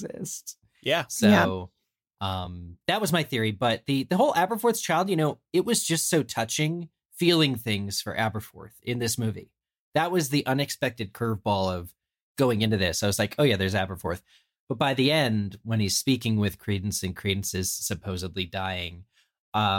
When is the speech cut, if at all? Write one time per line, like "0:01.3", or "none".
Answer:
none